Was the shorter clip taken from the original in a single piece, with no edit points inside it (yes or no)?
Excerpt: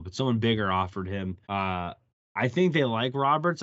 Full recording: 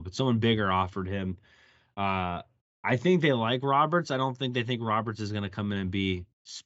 no